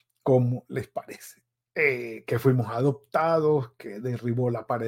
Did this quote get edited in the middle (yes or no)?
no